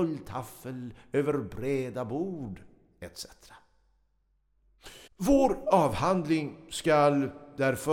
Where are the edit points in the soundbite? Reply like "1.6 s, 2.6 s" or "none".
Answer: 5.1 s